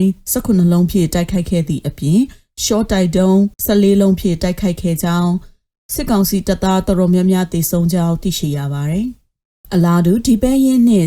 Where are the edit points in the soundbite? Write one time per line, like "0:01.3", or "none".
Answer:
0:03.5